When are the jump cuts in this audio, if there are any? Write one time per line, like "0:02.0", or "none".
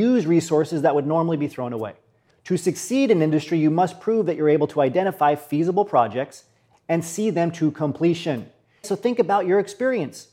0:02.3
0:06.7
0:08.8